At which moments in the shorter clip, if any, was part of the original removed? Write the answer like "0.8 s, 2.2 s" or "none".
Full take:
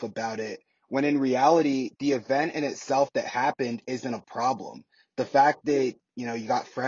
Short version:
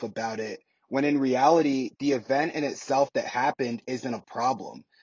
none